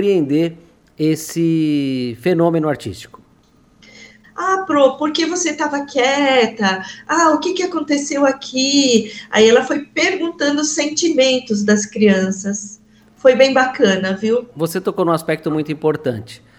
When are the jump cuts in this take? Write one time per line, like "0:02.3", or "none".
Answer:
0:04.2